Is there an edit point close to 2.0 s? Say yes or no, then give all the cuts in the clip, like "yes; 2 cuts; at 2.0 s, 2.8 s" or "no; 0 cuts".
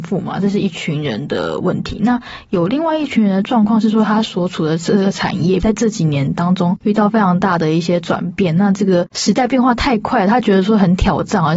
no; 1 cut; at 5.6 s